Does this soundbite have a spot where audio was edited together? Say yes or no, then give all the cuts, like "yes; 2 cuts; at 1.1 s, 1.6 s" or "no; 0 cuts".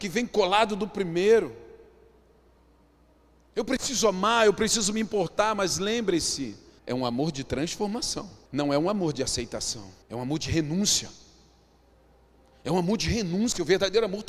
yes; 3 cuts; at 6.8 s, 8.5 s, 10.0 s